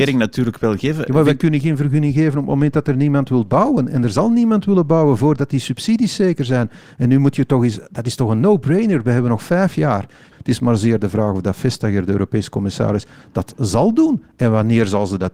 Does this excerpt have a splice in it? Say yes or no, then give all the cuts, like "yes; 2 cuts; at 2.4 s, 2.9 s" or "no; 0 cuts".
yes; 1 cut; at 10.3 s